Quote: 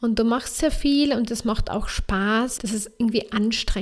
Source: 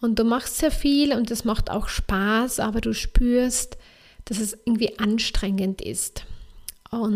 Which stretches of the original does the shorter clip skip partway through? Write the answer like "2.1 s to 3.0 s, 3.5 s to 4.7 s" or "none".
2.6 s to 4.2 s